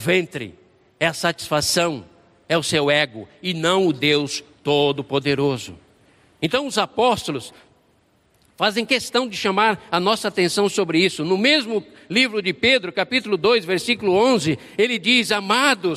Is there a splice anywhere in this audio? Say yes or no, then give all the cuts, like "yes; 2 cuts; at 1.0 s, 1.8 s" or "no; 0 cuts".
no; 0 cuts